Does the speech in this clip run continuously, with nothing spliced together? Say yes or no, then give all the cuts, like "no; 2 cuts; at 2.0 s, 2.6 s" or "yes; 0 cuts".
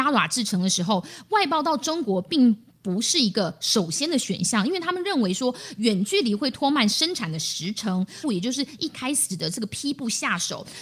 no; 1 cut; at 8.2 s